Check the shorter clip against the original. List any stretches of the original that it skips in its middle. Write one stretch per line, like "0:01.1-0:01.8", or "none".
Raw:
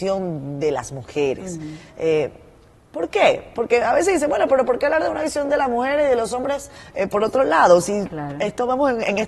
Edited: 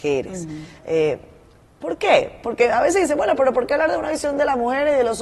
none